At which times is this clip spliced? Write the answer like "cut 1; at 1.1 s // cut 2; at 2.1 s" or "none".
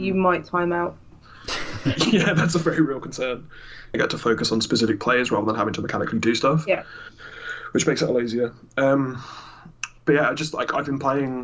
cut 1; at 3.9 s